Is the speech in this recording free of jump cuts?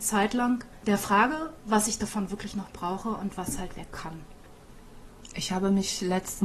yes; 0 cuts

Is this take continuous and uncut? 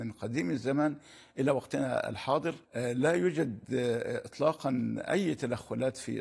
no; 1 cut; at 2.6 s

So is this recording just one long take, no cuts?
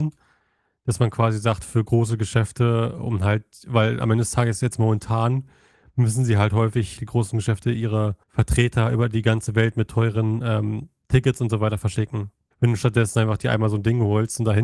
no; 3 cuts; at 7.0 s, 8.2 s, 12.5 s

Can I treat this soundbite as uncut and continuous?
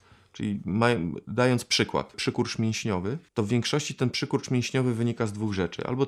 no; 2 cuts; at 2.1 s, 3.3 s

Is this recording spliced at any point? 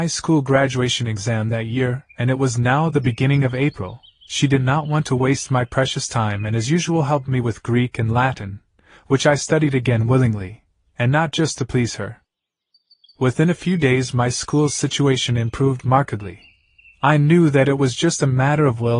no; 0 cuts

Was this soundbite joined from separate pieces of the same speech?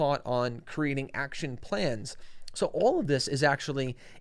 no; 0 cuts

